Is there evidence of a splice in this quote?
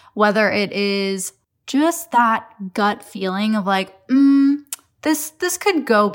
no; 0 cuts

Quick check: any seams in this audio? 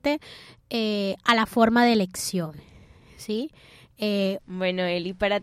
yes; 1 cut; at 4.4 s

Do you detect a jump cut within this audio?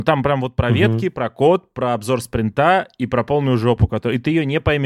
no; 0 cuts

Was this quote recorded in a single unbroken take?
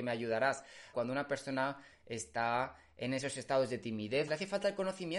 no; 2 cuts; at 0.9 s, 4.3 s

